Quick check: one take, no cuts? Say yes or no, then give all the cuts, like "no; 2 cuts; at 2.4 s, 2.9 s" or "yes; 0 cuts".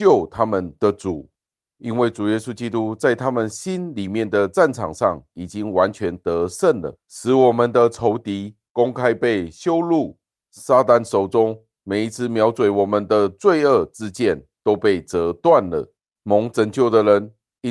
no; 2 cuts; at 7.0 s, 16.2 s